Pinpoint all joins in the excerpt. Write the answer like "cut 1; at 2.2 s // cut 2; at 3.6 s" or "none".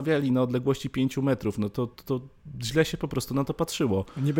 none